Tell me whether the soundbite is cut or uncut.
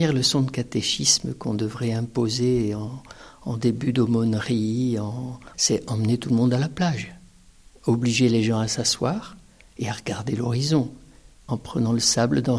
cut